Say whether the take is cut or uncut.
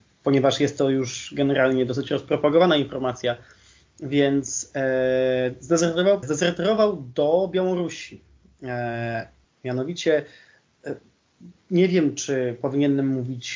cut